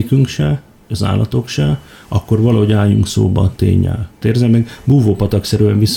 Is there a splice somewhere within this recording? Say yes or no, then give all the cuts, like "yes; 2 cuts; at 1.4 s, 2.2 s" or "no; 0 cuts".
yes; 1 cut; at 4.2 s